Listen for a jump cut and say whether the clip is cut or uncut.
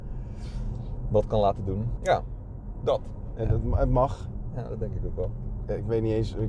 cut